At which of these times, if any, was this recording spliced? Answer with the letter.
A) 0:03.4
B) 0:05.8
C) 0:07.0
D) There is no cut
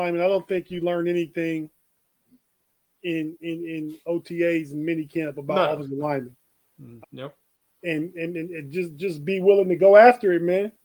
C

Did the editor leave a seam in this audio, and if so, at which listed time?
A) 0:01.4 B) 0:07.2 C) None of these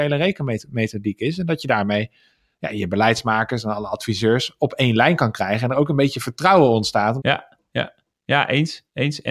B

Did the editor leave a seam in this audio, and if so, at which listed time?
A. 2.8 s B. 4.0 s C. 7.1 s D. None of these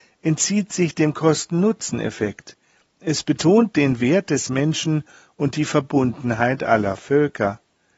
D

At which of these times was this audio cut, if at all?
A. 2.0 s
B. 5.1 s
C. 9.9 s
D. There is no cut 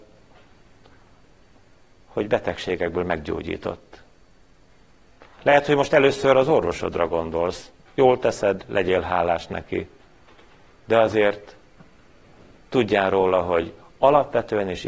D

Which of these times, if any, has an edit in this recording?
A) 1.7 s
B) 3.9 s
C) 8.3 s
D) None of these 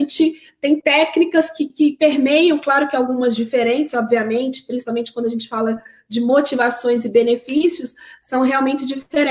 A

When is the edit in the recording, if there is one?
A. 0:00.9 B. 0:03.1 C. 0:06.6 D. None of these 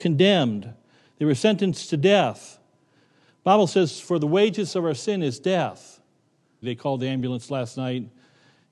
C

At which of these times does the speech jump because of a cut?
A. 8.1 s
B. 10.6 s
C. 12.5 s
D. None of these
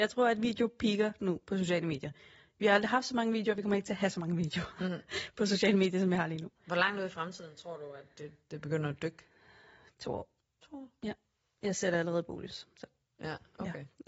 D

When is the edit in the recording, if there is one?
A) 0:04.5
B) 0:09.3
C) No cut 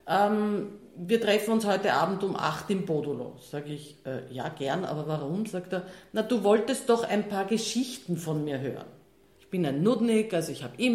B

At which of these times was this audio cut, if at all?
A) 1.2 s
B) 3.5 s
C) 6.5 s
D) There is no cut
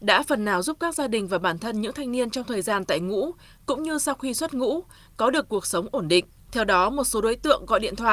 C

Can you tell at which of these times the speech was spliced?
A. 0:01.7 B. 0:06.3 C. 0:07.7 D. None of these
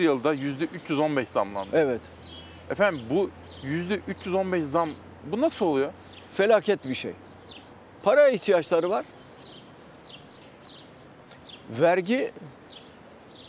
D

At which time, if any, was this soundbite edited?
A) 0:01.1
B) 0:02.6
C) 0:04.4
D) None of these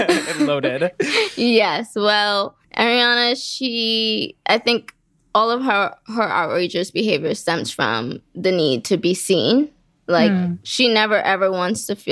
B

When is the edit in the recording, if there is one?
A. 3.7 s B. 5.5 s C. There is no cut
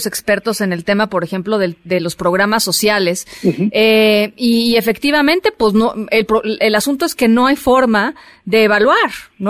C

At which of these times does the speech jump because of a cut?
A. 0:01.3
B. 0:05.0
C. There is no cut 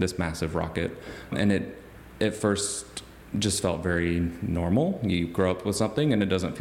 C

